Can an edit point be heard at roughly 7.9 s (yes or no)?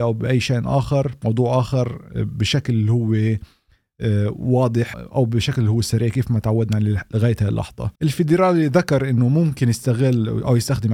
yes